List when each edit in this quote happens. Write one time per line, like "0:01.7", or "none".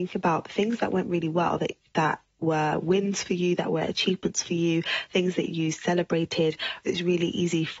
0:06.8